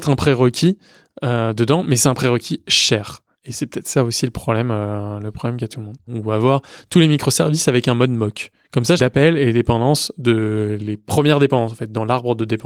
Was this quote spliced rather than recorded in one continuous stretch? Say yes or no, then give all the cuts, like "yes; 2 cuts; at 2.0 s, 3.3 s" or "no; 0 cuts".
yes; 2 cuts; at 6.1 s, 9.0 s